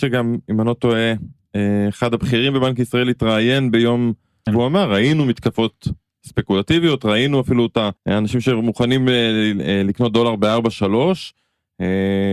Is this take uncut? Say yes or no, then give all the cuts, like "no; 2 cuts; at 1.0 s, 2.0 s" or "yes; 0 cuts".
no; 2 cuts; at 4.5 s, 8.0 s